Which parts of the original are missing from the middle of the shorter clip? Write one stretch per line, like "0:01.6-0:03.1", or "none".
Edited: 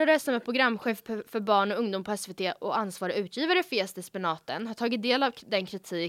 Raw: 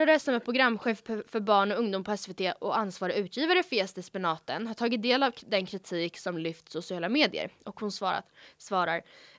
none